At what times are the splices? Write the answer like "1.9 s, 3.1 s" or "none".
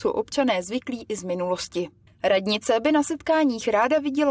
2.1 s